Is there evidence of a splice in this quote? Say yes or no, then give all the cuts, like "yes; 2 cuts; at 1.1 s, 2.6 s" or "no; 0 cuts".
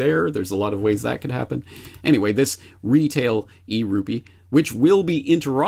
no; 0 cuts